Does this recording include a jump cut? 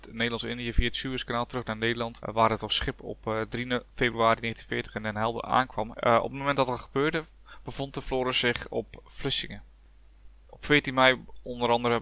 yes; 3 cuts; at 2.2 s, 5.9 s, 10.4 s

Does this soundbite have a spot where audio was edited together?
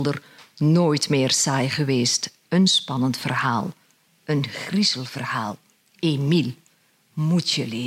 no; 0 cuts

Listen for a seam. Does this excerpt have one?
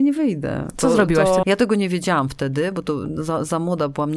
yes; 1 cut; at 1.4 s

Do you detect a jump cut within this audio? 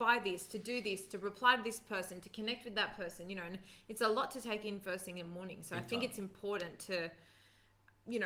no; 0 cuts

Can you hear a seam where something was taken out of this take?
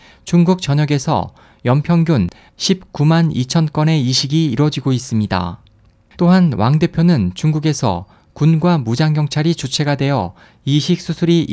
yes; 1 cut; at 6.1 s

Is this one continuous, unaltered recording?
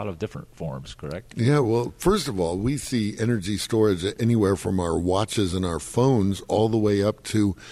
yes; 0 cuts

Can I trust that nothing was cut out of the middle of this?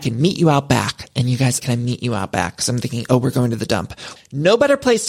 no; 2 cuts; at 1.6 s, 4.2 s

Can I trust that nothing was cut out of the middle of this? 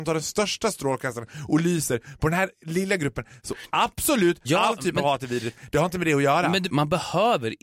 no; 2 cuts; at 4.4 s, 6.7 s

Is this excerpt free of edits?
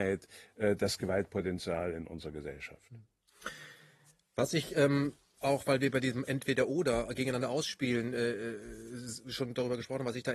yes; 0 cuts

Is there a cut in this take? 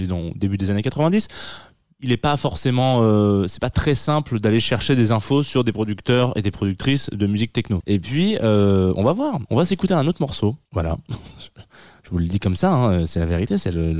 yes; 3 cuts; at 7.8 s, 9.5 s, 10.6 s

